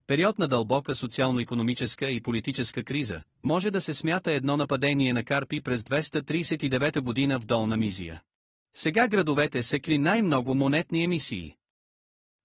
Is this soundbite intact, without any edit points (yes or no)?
no